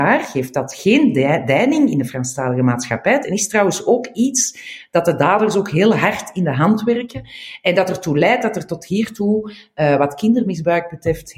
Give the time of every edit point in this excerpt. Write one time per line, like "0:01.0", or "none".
0:03.2